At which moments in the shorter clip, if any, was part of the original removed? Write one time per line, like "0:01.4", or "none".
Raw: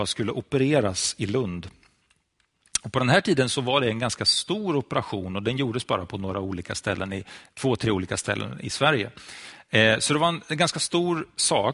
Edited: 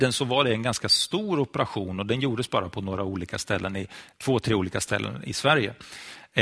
none

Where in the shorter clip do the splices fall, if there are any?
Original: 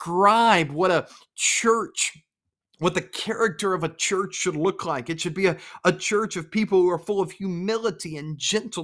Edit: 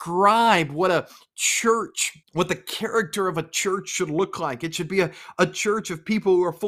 0:02.2

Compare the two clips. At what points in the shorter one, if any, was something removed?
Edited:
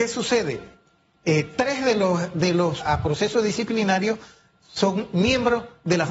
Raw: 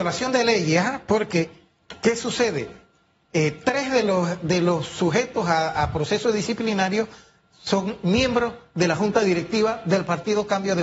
0:02.8

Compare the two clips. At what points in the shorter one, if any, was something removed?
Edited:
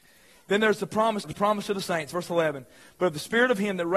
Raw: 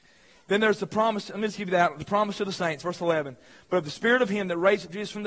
0:01.2

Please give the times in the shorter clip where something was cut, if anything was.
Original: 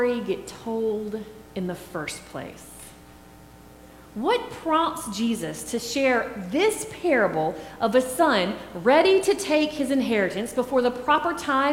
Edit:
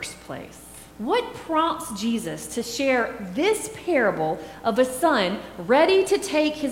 0:00.9

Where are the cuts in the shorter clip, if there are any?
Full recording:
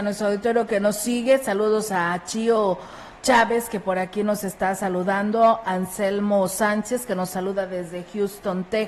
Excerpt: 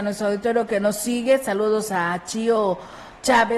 none

